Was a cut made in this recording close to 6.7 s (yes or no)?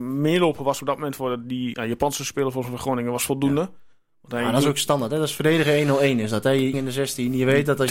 yes